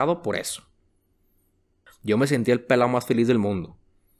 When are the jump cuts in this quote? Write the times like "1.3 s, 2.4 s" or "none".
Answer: 1.9 s

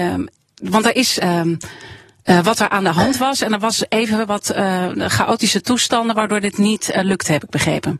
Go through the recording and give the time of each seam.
1.2 s

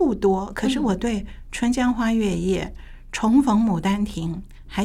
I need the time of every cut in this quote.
none

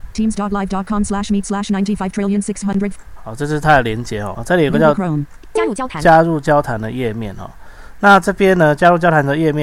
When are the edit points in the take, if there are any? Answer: 4.3 s

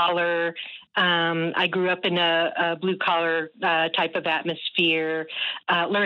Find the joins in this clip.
none

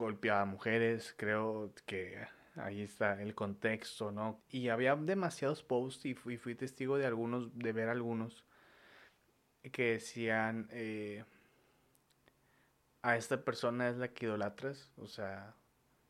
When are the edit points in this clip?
4.4 s

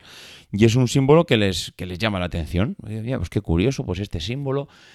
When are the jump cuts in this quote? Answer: none

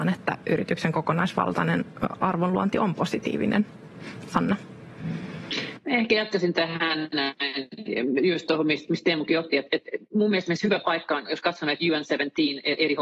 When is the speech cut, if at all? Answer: none

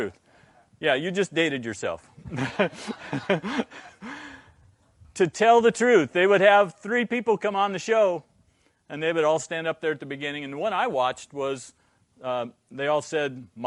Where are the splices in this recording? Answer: none

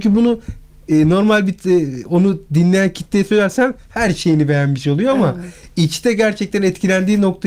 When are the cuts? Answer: none

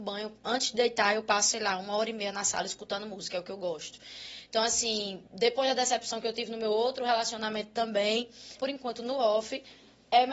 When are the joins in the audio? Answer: 8.6 s

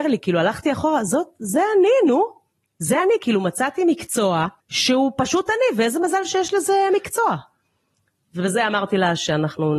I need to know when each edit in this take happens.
none

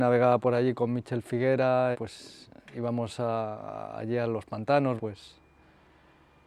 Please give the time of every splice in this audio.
1.9 s, 5.0 s

